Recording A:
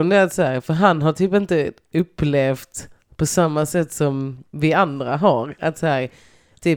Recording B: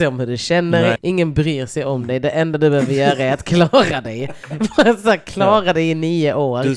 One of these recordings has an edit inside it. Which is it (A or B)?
B